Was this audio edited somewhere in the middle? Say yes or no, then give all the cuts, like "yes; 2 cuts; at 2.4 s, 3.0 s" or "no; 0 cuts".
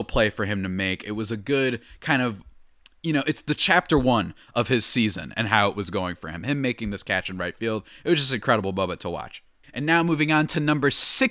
no; 0 cuts